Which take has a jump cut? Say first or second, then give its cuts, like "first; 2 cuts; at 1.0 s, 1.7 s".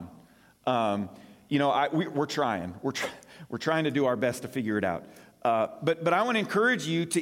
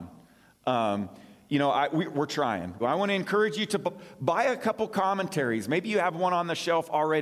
second; 1 cut; at 2.8 s